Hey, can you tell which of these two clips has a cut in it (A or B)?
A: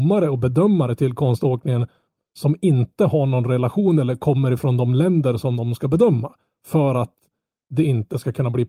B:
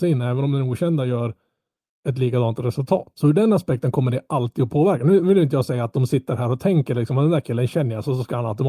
B